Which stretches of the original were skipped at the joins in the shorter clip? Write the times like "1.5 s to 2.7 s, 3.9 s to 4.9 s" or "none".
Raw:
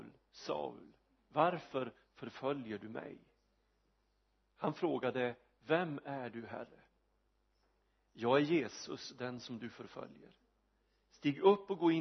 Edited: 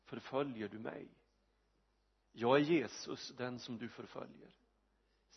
4.3 s to 8.0 s